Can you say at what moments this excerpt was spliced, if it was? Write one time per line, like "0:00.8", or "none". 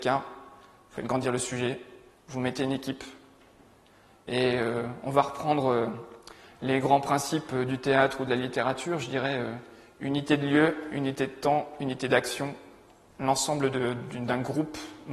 none